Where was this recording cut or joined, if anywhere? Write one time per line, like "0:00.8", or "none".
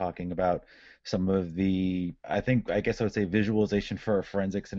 0:02.2